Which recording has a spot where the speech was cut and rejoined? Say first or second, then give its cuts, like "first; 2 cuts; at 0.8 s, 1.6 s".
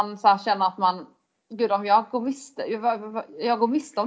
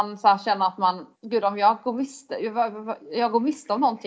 second; 1 cut; at 1.1 s